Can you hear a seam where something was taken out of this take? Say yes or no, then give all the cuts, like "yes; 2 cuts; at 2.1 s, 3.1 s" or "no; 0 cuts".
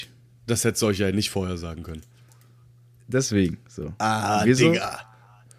no; 0 cuts